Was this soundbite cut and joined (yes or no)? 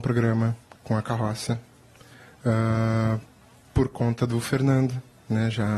no